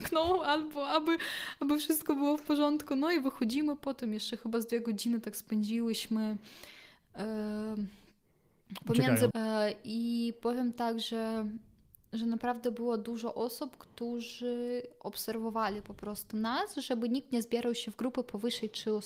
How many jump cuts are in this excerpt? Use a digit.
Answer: 1